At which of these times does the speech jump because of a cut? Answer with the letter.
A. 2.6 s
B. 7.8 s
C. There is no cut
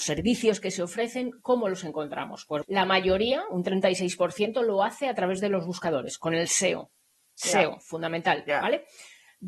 A